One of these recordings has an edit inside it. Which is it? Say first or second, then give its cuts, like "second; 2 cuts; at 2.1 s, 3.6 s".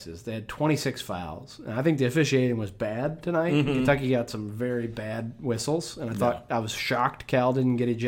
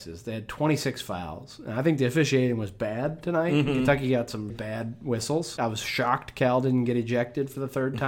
second; 2 cuts; at 4.5 s, 5.6 s